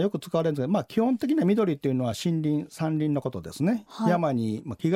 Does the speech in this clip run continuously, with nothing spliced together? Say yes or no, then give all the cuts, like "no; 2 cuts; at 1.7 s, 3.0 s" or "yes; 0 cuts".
yes; 0 cuts